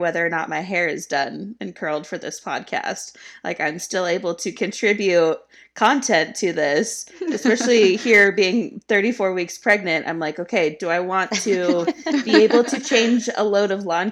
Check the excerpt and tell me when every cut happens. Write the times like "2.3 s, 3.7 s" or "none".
none